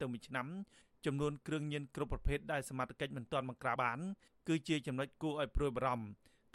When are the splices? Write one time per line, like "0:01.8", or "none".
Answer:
0:03.8